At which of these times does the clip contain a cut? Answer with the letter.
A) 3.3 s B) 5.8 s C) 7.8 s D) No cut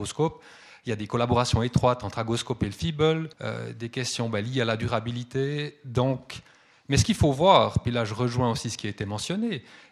A